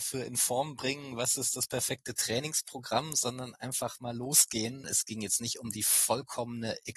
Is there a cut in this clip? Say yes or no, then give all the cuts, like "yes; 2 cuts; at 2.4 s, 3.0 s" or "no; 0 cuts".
yes; 1 cut; at 4.8 s